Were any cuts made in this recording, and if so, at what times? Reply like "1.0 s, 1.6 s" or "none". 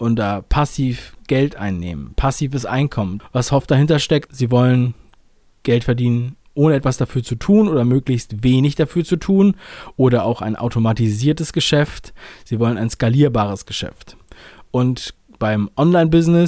3.2 s, 4.3 s, 6.5 s